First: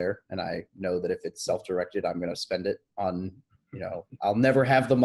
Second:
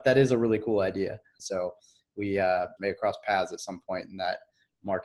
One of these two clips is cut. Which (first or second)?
second